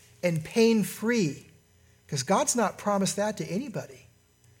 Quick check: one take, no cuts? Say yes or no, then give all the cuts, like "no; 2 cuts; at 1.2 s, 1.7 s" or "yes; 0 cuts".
yes; 0 cuts